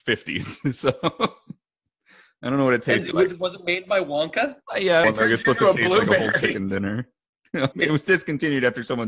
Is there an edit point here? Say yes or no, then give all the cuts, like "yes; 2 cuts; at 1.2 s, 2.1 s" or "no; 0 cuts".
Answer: yes; 2 cuts; at 5.0 s, 7.7 s